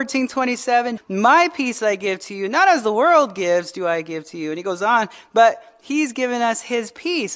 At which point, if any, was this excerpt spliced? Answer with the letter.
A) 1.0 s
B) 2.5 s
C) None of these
A